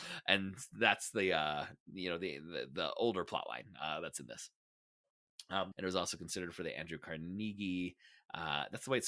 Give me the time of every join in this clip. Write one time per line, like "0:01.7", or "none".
0:05.7

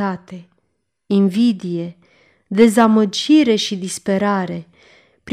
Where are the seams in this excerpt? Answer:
none

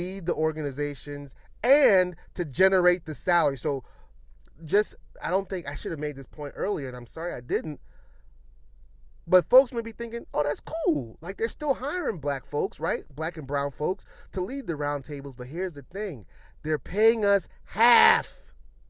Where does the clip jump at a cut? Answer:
none

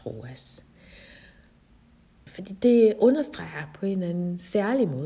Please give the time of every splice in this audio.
0:02.3

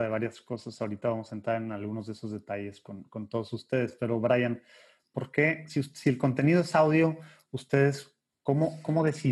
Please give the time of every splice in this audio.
none

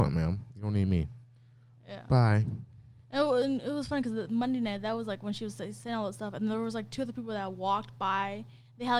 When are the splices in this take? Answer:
none

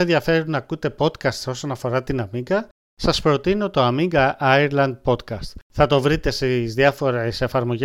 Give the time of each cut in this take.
0:05.6

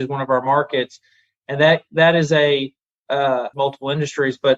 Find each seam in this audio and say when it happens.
0:03.5

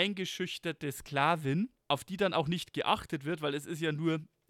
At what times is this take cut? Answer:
0:01.8

